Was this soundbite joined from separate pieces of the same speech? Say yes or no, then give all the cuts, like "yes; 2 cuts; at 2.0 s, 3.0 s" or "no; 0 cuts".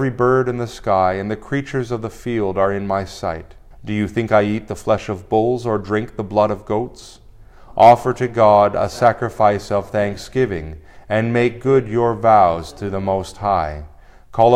yes; 1 cut; at 3.7 s